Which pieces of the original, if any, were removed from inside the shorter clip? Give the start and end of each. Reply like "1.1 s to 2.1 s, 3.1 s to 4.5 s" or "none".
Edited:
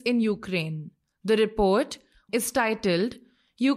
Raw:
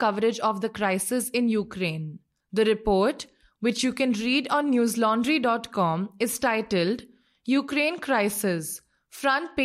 3.6 s to 6.2 s